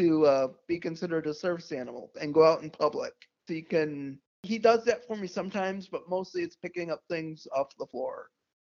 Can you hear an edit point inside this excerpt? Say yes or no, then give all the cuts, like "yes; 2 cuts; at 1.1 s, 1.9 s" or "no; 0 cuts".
yes; 1 cut; at 3.5 s